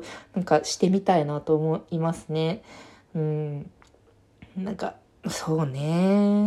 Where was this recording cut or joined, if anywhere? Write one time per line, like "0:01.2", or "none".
none